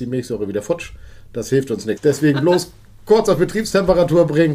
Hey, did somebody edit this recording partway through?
yes; 1 cut; at 2.0 s

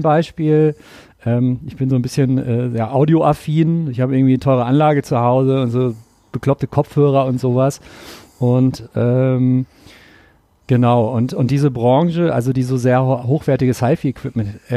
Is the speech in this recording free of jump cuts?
yes; 0 cuts

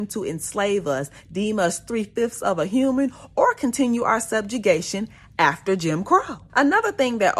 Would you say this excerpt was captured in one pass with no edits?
yes; 0 cuts

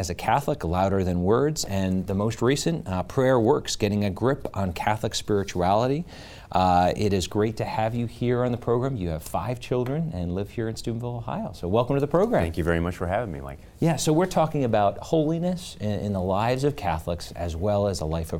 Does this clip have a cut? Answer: no; 0 cuts

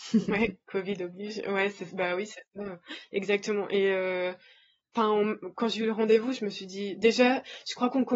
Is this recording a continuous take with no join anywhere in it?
yes; 0 cuts

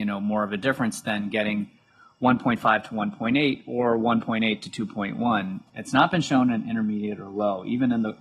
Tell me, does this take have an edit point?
yes; 1 cut; at 5.7 s

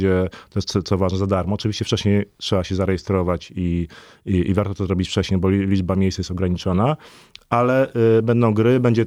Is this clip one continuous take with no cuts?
yes; 0 cuts

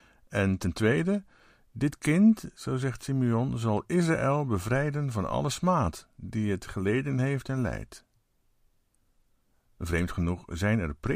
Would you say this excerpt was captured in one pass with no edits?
yes; 0 cuts

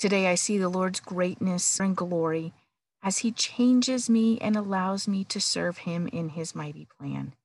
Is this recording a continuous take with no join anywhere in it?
no; 1 cut; at 1.8 s

